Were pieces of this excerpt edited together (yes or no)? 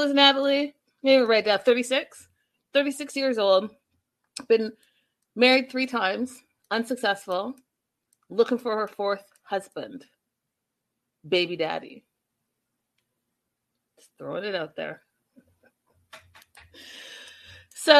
no